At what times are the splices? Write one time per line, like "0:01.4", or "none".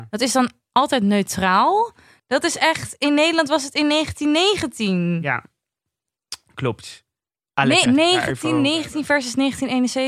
0:02.2
0:07.9